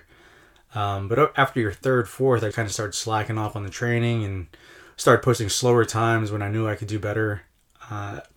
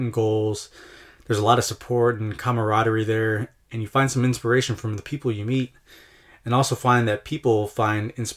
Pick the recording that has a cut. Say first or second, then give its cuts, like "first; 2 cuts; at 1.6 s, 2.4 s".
first; 1 cut; at 2.5 s